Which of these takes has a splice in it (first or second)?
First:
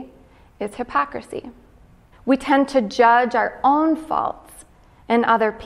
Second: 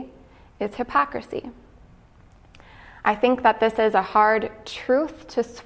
first